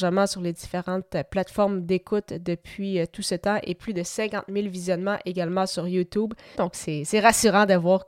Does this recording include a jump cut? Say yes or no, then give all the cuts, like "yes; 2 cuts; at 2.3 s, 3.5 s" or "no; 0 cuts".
yes; 1 cut; at 6.5 s